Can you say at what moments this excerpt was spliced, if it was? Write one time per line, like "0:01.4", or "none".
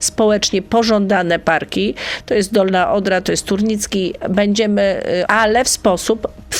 0:05.3